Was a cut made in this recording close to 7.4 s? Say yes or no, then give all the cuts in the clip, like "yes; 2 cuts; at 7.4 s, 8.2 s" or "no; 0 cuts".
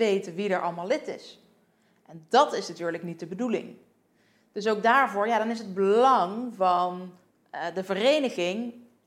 no; 0 cuts